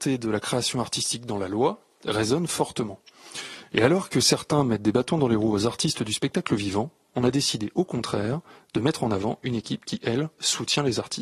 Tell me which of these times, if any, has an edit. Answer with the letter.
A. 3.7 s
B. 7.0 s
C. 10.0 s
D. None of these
A